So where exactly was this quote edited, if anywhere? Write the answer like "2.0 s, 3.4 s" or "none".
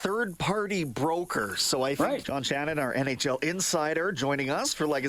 2.2 s